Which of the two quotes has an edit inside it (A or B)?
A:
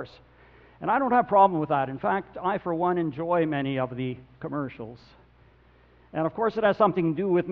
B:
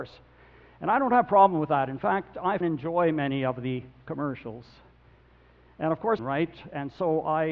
B